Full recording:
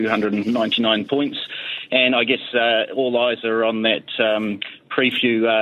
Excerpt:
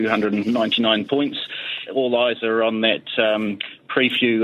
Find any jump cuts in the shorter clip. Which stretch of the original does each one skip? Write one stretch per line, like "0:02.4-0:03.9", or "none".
0:01.9-0:02.9